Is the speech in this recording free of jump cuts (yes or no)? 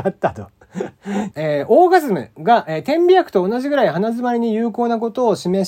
no